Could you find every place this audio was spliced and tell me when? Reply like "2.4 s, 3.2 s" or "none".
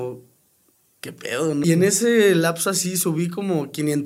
1.6 s